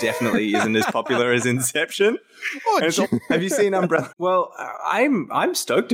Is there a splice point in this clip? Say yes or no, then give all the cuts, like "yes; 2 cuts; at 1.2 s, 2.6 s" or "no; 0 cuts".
yes; 2 cuts; at 3.0 s, 4.1 s